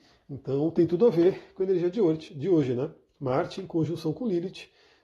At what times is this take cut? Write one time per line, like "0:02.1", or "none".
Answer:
none

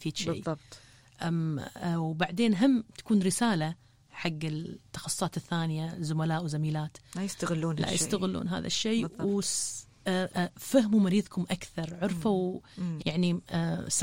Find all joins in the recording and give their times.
0:10.3
0:13.0

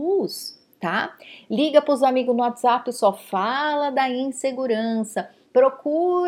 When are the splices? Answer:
0:01.4

